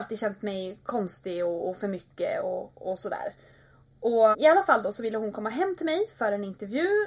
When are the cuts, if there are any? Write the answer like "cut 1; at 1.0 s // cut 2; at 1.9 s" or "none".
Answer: cut 1; at 4.3 s

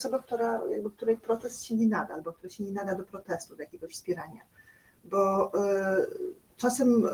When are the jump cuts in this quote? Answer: none

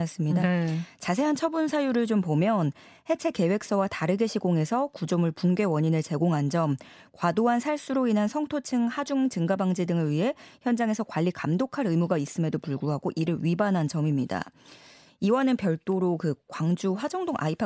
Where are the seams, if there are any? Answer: none

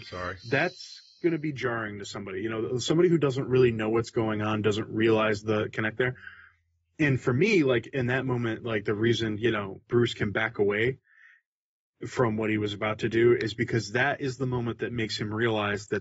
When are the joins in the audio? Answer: none

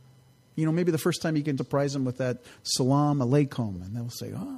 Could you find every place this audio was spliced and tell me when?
cut 1; at 1.6 s

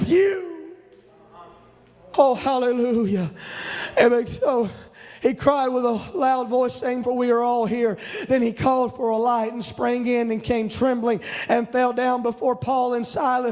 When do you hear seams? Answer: cut 1; at 7.0 s

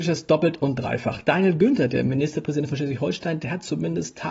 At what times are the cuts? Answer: none

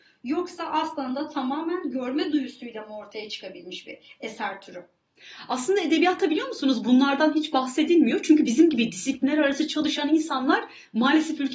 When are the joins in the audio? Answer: none

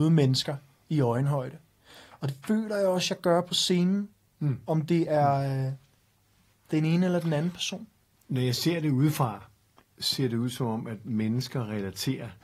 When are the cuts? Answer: none

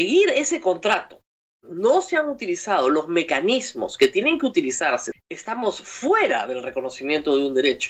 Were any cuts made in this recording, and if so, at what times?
cut 1; at 5.1 s

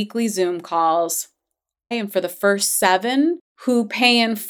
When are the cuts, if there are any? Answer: cut 1; at 1.9 s

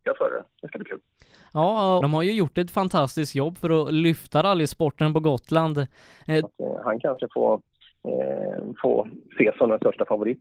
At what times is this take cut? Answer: cut 1; at 2.0 s // cut 2; at 6.4 s

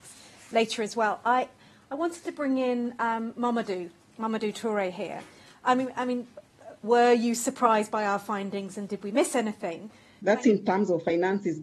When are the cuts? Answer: cut 1; at 6.8 s // cut 2; at 10.2 s

